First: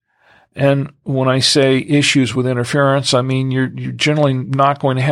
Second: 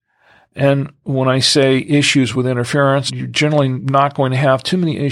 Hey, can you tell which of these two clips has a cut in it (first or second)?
second